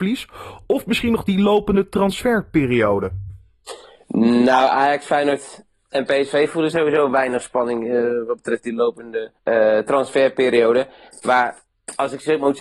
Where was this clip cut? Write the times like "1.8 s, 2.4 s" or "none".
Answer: 9.4 s